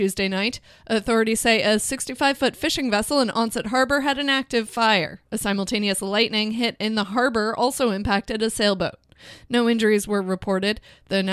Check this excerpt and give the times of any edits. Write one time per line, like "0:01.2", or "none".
none